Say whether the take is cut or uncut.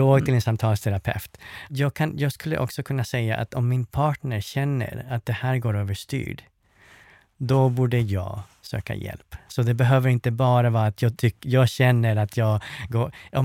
cut